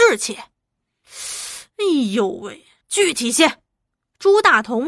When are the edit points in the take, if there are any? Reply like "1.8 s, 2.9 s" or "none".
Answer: 2.8 s